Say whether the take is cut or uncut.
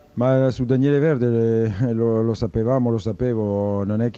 uncut